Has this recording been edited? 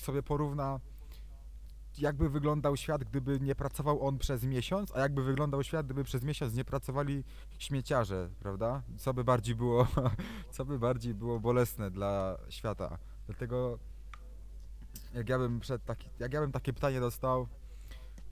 no; 0 cuts

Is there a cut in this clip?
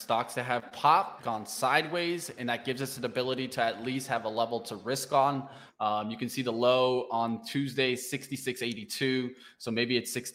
yes; 2 cuts; at 1.2 s, 5.7 s

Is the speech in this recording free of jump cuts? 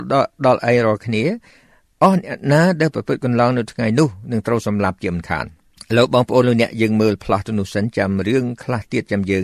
yes; 0 cuts

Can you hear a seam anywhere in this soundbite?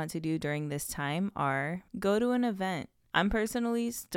no; 0 cuts

